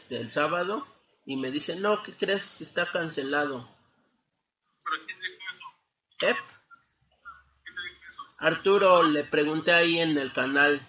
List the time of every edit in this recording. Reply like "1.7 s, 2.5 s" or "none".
none